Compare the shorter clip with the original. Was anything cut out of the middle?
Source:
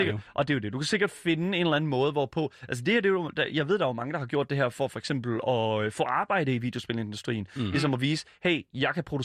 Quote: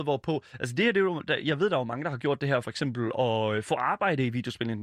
yes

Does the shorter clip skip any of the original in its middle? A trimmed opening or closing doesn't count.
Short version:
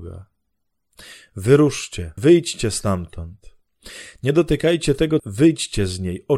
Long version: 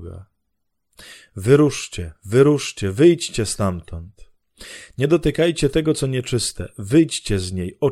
yes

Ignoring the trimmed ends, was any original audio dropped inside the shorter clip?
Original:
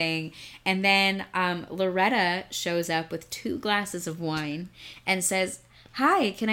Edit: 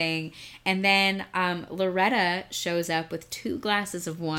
no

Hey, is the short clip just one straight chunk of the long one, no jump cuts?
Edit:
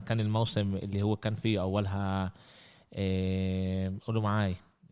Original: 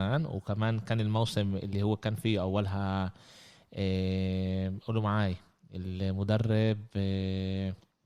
yes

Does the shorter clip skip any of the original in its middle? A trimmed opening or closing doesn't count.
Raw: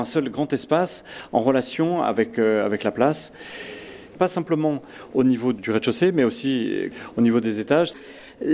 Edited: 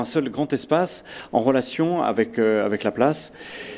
no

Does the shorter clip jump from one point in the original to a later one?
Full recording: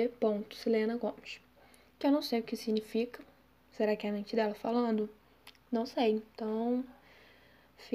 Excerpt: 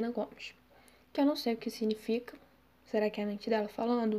no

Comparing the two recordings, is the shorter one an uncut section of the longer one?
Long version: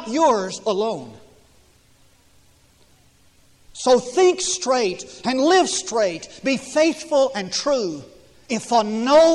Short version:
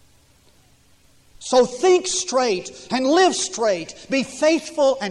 yes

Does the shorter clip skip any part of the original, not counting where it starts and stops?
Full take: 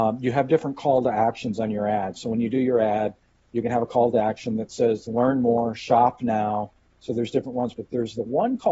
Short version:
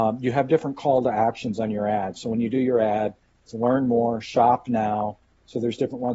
yes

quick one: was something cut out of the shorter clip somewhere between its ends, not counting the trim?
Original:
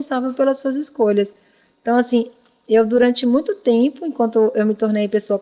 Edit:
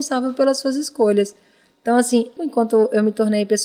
yes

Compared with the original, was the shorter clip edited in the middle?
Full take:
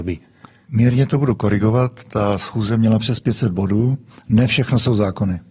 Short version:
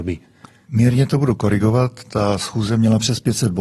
no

